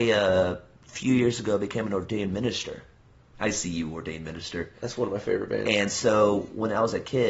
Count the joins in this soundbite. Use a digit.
1